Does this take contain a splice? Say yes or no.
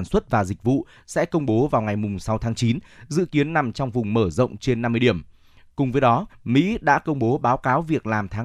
yes